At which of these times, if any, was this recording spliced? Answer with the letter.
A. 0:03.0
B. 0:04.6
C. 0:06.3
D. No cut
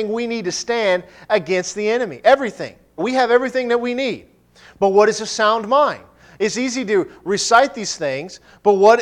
A